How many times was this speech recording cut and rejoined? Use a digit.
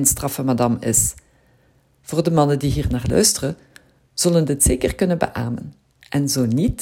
0